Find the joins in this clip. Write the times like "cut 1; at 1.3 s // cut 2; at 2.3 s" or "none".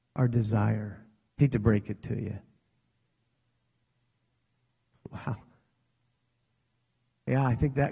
cut 1; at 1.3 s // cut 2; at 4.9 s